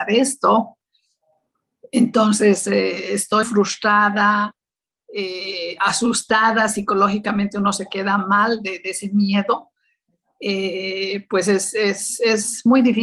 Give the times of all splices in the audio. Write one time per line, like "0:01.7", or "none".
0:03.4